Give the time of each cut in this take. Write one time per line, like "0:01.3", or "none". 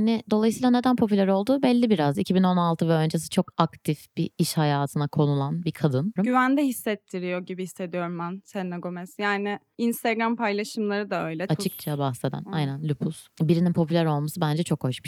0:02.1
0:06.2
0:11.5